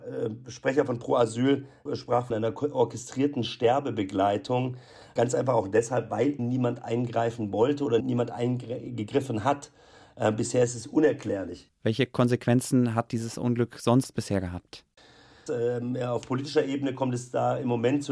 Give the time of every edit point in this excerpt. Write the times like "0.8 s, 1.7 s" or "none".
6.4 s, 11.7 s, 15.5 s